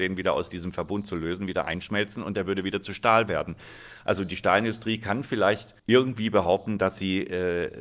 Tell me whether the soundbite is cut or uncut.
cut